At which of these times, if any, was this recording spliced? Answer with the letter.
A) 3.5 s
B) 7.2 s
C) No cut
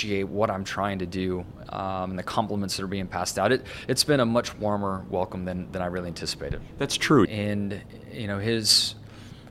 B